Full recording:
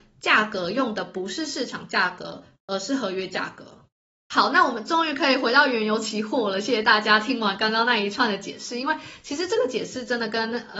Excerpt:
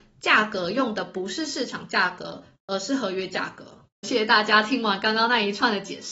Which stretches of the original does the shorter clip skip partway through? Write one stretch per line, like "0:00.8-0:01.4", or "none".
0:04.0-0:06.6